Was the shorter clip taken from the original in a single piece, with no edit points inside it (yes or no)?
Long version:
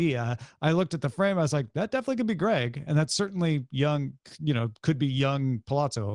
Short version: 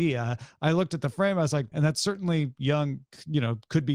no